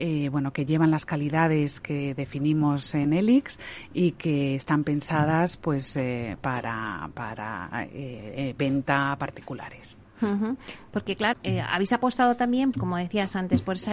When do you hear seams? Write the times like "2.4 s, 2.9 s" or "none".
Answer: 11.3 s, 12.7 s